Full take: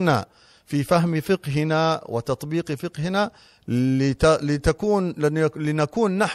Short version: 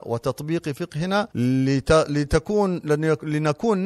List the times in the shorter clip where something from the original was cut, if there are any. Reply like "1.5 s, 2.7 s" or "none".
1.3 s